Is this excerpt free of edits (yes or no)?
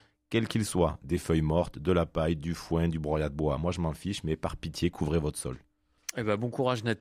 yes